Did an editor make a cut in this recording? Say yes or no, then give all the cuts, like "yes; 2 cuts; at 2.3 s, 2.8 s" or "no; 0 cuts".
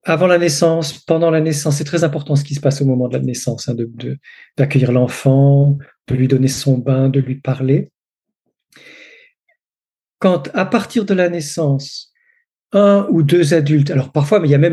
no; 0 cuts